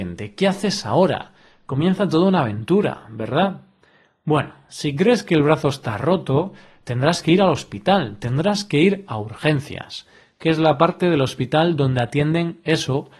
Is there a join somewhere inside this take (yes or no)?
no